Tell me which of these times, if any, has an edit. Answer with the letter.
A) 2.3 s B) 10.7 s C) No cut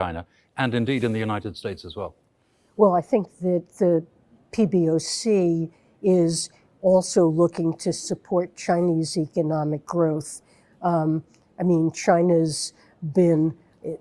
C